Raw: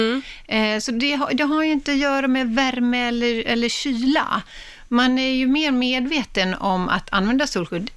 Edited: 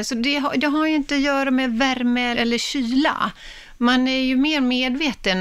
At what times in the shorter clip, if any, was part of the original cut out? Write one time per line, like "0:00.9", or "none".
0:02.3